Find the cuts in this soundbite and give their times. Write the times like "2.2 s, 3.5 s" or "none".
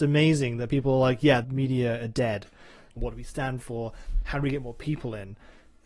1.4 s, 3.0 s